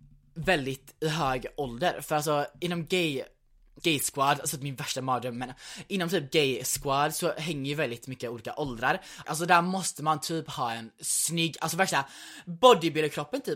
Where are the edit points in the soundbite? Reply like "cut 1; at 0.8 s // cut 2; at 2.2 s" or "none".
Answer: cut 1; at 3.8 s // cut 2; at 9.2 s